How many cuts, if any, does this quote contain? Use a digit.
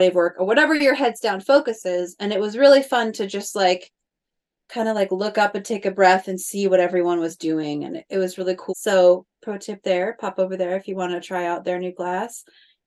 1